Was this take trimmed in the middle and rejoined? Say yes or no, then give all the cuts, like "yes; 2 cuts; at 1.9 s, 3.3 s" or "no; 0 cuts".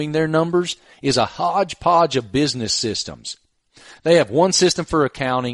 no; 0 cuts